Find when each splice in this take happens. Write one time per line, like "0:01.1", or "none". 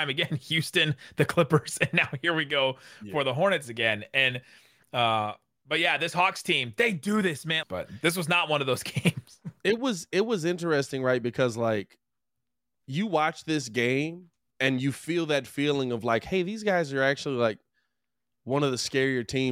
0:07.6